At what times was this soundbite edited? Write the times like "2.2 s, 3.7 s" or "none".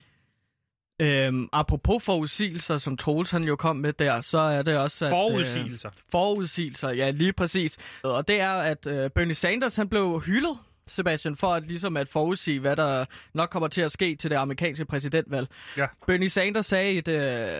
8.0 s